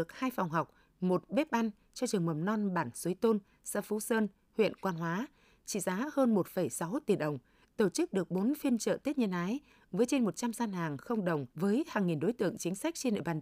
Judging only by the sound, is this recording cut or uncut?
cut